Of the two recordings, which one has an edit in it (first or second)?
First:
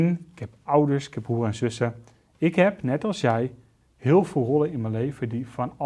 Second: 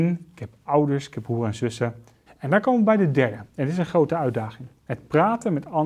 second